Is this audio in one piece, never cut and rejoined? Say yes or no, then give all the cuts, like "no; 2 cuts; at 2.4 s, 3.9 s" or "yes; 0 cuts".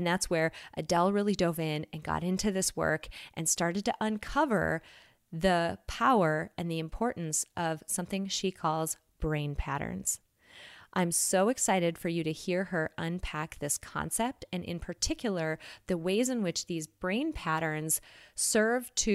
yes; 0 cuts